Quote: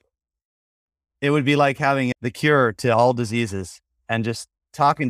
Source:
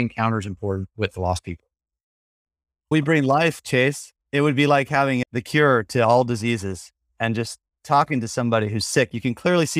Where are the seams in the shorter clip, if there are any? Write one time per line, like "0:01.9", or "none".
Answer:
0:01.1